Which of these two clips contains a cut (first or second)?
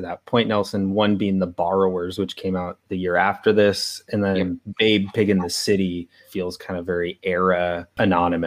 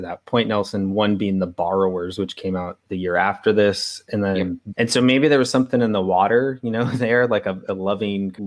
second